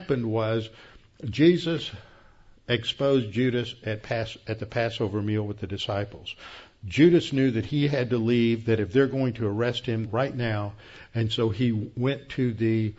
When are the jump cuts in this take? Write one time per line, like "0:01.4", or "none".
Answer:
0:10.0